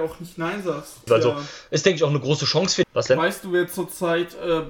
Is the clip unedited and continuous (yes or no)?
no